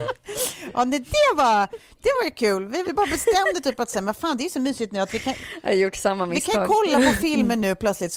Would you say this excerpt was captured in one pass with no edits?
no; 1 cut; at 2.8 s

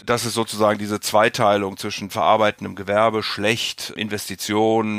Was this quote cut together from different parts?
no; 0 cuts

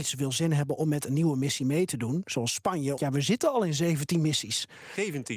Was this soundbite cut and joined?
yes; 1 cut; at 3.0 s

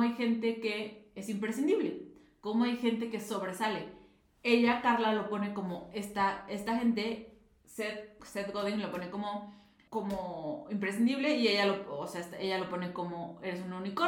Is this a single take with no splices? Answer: no; 2 cuts; at 8.2 s, 9.9 s

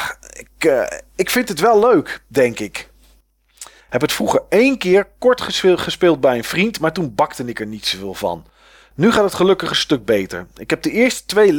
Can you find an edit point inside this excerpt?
yes; 1 cut; at 3.8 s

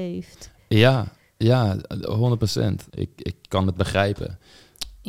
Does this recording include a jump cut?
yes; 1 cut; at 2.9 s

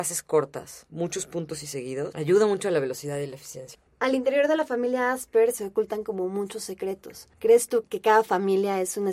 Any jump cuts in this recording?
no; 0 cuts

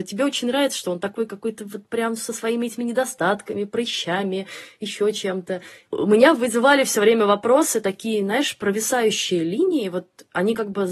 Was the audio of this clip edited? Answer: yes; 1 cut; at 5.8 s

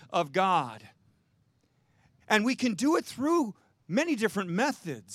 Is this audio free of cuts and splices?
yes; 0 cuts

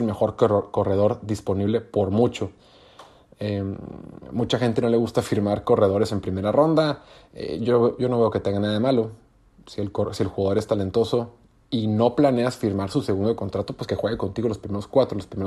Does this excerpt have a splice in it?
no; 0 cuts

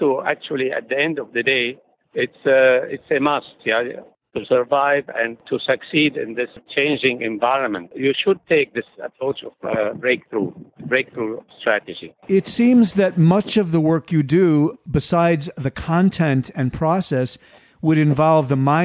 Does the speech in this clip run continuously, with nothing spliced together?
yes; 0 cuts

